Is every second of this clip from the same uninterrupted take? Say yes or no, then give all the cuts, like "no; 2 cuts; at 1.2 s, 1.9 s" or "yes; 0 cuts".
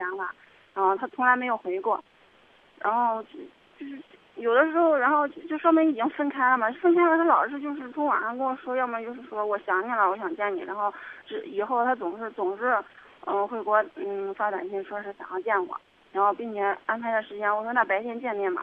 yes; 0 cuts